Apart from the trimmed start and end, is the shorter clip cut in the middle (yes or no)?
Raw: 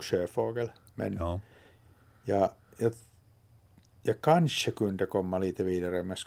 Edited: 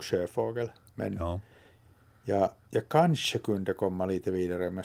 yes